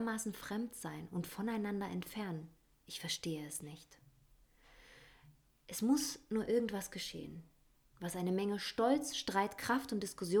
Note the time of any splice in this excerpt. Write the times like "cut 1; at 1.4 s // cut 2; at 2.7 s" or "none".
none